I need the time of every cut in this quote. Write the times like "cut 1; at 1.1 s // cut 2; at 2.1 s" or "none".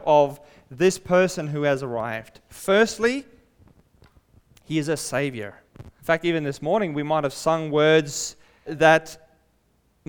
cut 1; at 6.0 s // cut 2; at 8.7 s